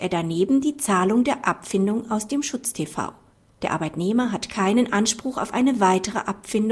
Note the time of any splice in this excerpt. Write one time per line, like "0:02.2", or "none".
0:03.5